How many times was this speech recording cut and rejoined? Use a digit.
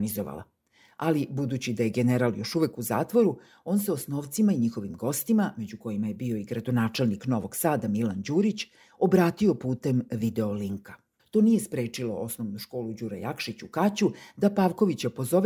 1